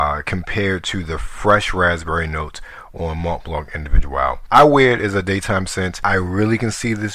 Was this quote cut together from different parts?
yes; 1 cut; at 4.5 s

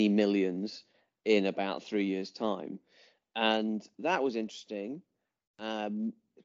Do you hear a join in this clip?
no; 0 cuts

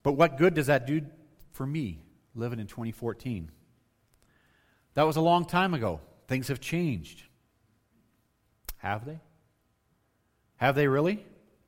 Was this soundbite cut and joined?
no; 0 cuts

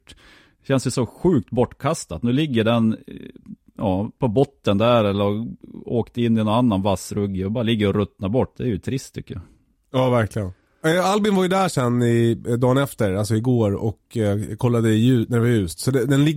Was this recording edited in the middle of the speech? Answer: yes; 1 cut; at 8.5 s

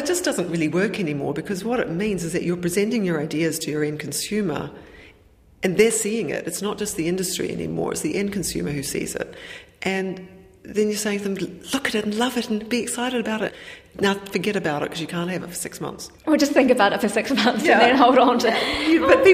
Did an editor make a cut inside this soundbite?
yes; 1 cut; at 16.2 s

